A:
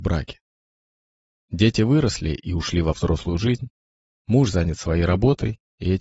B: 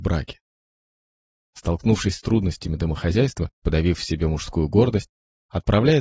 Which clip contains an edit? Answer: B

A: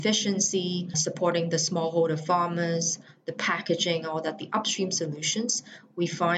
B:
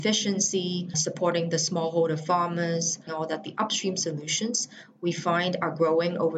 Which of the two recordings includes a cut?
B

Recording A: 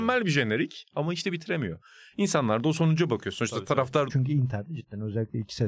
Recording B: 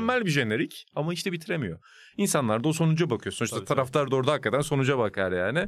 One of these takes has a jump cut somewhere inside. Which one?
A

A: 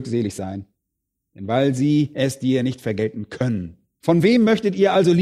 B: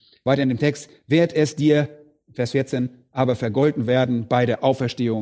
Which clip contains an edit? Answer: A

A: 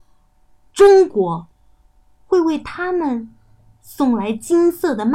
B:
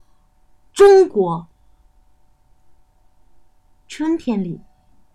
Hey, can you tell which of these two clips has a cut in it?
A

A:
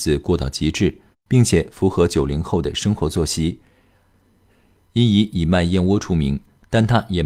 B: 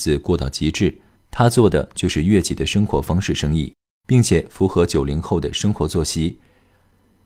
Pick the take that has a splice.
A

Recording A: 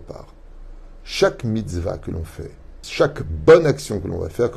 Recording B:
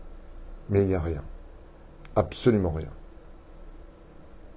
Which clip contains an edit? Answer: A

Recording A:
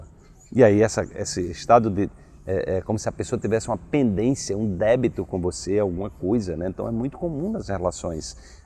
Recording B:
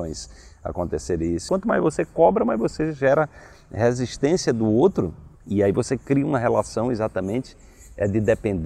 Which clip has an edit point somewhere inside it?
B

